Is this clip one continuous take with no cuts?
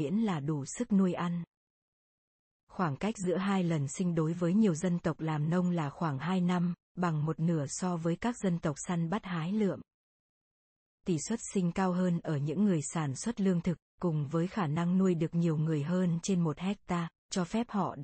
yes; 0 cuts

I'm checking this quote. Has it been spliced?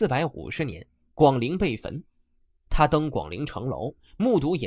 yes; 2 cuts; at 1.0 s, 2.5 s

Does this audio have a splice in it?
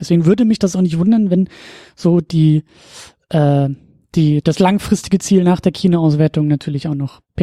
no; 0 cuts

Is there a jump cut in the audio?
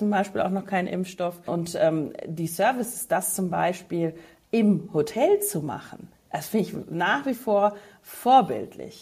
yes; 1 cut; at 1.5 s

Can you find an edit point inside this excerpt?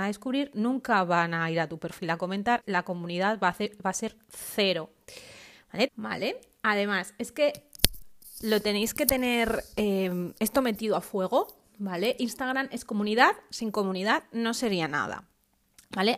yes; 2 cuts; at 2.6 s, 5.9 s

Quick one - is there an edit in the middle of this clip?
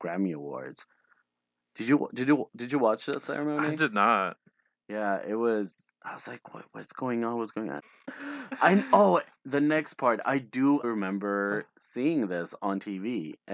yes; 2 cuts; at 7.8 s, 10.8 s

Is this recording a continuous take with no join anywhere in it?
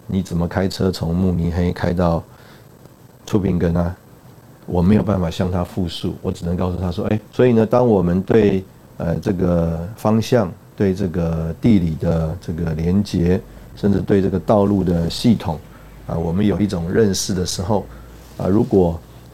no; 1 cut; at 7.3 s

